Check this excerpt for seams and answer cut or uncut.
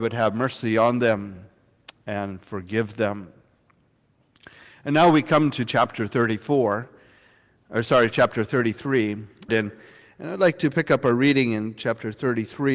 cut